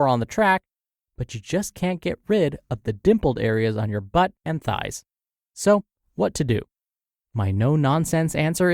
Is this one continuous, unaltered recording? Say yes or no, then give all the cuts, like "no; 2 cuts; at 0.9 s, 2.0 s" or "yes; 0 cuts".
yes; 0 cuts